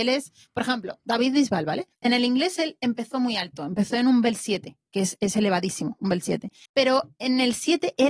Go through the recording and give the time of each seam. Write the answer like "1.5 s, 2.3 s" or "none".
1.9 s, 6.7 s